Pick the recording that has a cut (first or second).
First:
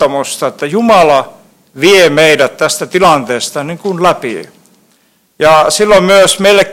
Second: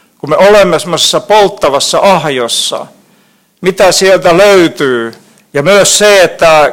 second